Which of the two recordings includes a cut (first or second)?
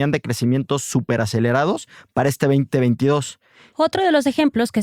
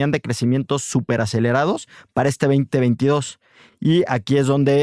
first